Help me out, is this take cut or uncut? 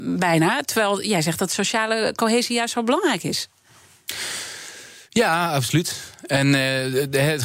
uncut